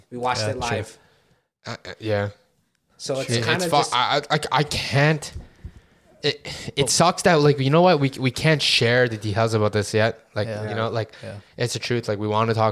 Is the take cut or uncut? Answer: uncut